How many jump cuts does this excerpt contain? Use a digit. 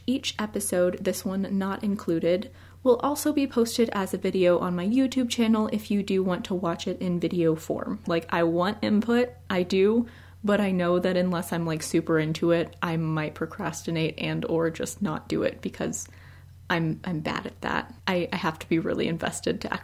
2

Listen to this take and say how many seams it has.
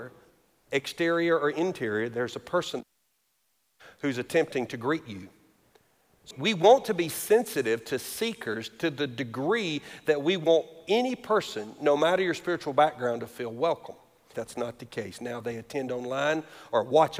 2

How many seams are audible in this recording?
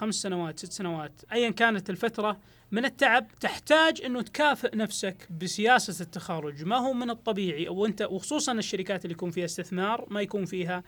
2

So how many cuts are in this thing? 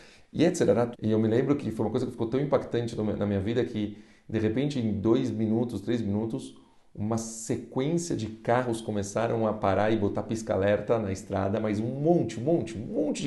1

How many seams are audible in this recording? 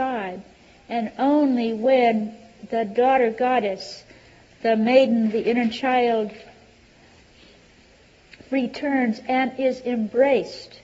0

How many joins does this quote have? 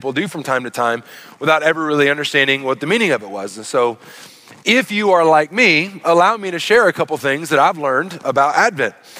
0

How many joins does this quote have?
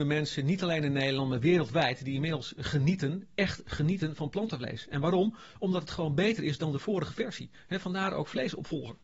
0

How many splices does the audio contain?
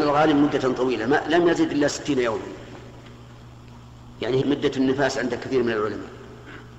1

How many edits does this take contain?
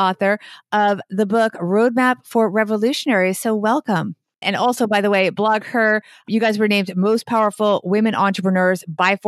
1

